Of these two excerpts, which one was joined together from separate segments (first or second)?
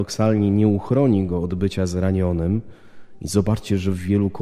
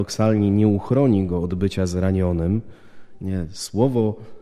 second